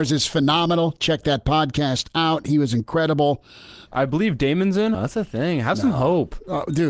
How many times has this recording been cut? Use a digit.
2